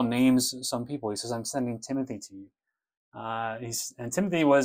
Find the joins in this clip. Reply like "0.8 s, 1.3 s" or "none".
none